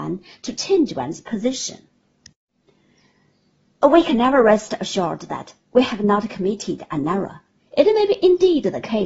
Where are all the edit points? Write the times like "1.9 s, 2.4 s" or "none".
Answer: 7.6 s